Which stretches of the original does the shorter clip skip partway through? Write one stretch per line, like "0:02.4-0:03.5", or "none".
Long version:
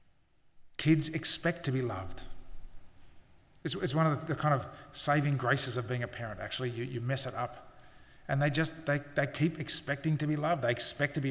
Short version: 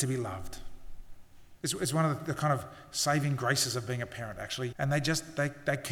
0:03.2-0:03.6
0:06.7-0:08.2